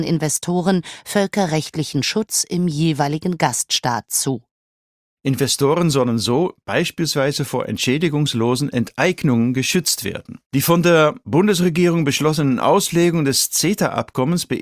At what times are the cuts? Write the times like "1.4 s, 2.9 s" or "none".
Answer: 5.1 s, 10.4 s